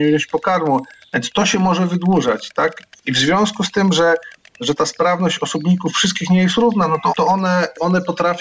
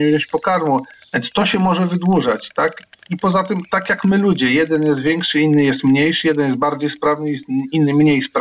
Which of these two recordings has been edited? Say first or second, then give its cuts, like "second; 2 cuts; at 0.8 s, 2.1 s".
first; 2 cuts; at 3.0 s, 7.1 s